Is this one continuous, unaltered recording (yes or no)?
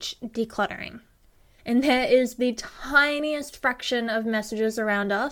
no